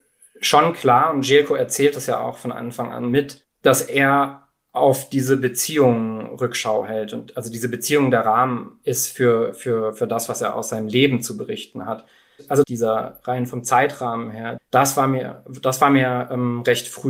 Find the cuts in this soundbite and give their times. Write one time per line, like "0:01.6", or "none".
0:12.6
0:14.6